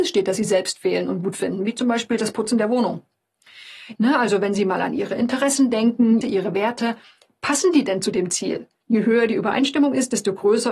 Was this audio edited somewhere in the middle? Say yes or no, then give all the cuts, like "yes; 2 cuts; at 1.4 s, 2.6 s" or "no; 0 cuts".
yes; 3 cuts; at 4.0 s, 6.2 s, 8.8 s